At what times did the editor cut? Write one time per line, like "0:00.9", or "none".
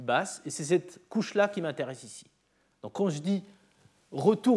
0:02.7